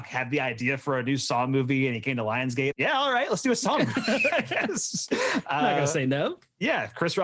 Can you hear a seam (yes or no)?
yes